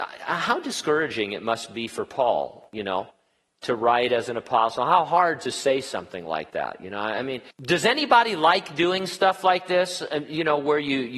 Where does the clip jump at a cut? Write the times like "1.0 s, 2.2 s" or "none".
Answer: 7.5 s